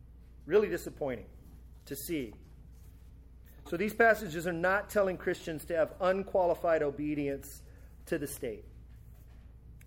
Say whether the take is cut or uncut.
uncut